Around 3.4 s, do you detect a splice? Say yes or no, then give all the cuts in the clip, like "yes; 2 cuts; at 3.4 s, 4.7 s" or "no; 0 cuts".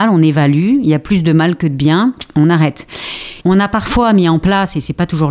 yes; 1 cut; at 3.4 s